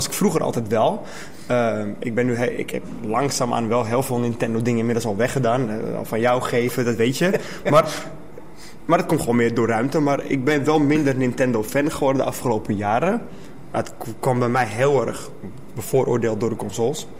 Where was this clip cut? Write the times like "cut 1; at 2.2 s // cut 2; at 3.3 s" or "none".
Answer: none